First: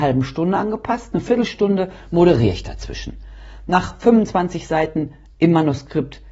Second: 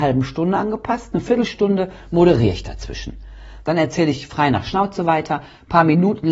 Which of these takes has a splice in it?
second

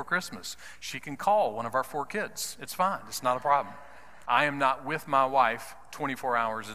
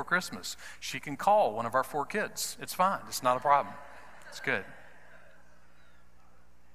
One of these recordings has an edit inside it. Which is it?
first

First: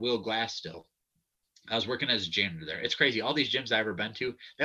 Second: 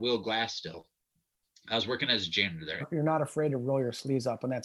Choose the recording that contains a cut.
second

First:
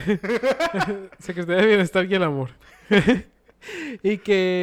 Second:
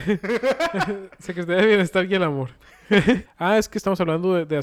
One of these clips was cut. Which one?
second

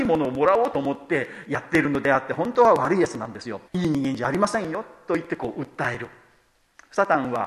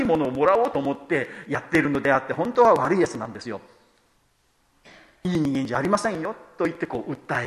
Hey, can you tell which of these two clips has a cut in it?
first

